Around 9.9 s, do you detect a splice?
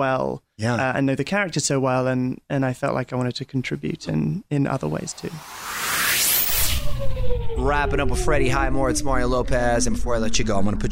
no; 0 cuts

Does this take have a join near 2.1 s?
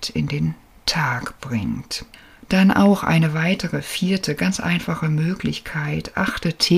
no; 0 cuts

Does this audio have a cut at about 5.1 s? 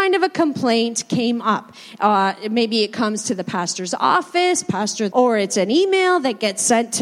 yes; 1 cut; at 5.1 s

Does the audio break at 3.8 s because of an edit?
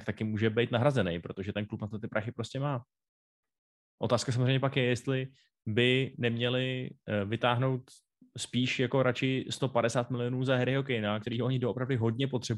no; 1 cut; at 11.2 s

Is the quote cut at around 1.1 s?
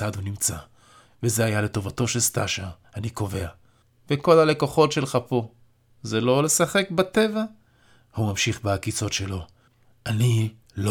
no; 0 cuts

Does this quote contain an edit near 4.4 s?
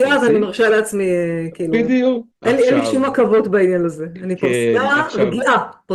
no; 1 cut; at 2.3 s

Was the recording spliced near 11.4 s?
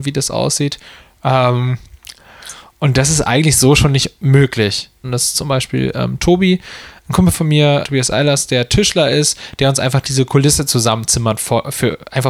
no; 2 cuts; at 5.0 s, 7.8 s

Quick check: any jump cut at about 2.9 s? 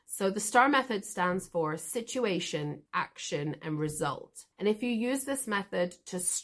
yes; 2 cuts; at 2.9 s, 4.5 s

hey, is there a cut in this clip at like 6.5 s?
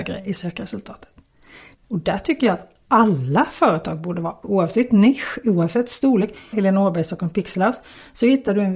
yes; 3 cuts; at 1.7 s, 4.4 s, 6.5 s

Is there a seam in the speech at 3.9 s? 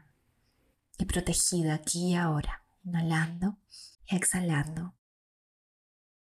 yes; 1 cut; at 3.9 s

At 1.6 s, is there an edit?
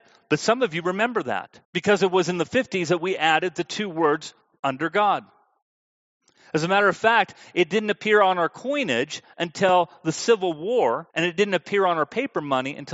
yes; 2 cuts; at 1.6 s, 11.1 s

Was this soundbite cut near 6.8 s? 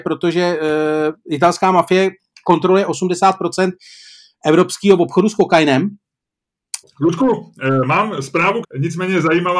yes; 2 cuts; at 6.8 s, 8.6 s

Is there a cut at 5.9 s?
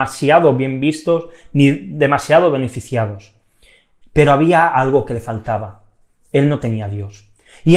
no; 1 cut; at 4.0 s

